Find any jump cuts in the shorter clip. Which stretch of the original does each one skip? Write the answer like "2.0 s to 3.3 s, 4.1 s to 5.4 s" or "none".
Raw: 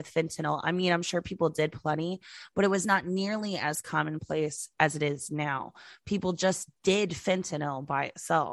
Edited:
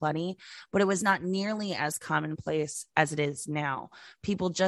none